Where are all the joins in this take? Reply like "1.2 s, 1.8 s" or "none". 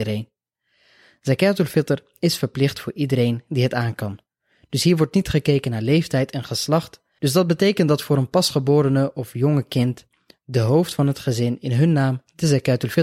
7.2 s